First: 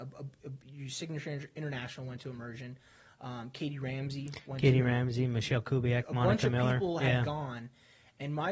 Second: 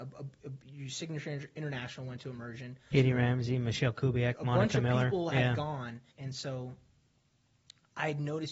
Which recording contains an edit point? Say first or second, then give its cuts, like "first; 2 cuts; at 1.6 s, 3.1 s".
second; 2 cuts; at 2.9 s, 6.1 s